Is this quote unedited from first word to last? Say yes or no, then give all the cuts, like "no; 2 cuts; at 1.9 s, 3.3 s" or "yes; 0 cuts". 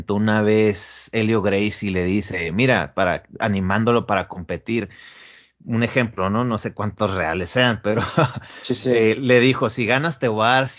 yes; 0 cuts